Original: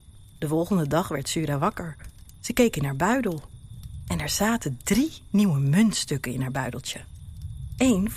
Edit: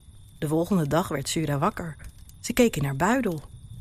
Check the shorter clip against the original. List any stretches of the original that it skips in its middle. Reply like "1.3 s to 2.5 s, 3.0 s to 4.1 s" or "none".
none